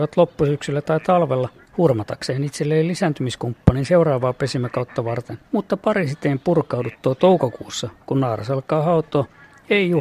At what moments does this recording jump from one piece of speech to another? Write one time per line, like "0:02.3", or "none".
0:05.5